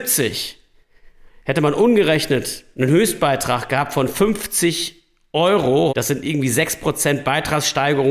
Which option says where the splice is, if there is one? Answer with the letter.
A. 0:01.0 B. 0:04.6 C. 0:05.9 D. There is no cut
C